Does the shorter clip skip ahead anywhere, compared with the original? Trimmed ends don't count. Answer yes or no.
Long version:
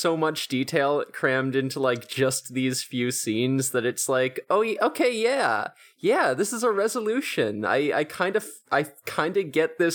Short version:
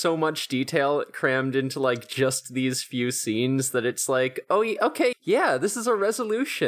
yes